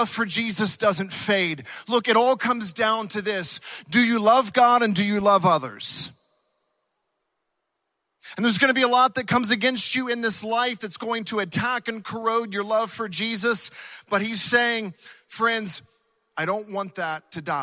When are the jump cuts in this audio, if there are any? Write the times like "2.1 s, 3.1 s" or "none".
none